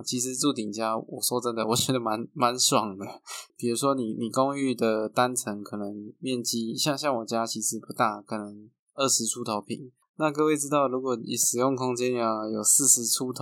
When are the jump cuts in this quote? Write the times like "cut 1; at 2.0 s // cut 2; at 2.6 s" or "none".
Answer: cut 1; at 3.5 s // cut 2; at 10.0 s